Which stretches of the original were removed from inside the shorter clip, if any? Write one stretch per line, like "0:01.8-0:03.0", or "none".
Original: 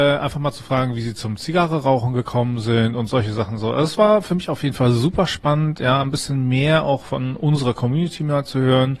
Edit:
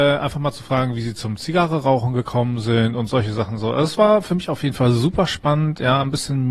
none